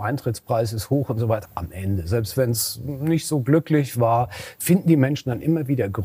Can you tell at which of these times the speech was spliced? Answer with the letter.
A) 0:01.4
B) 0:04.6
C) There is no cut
A